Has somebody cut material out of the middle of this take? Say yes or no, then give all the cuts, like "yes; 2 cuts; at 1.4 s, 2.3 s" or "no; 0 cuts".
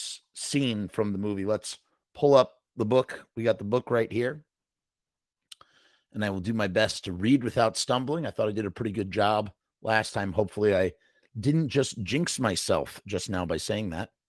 no; 0 cuts